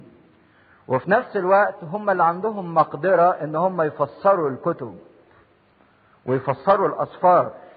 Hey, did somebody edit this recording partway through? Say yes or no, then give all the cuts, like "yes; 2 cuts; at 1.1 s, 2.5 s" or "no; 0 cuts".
no; 0 cuts